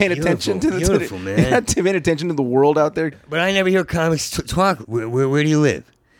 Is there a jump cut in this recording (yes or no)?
yes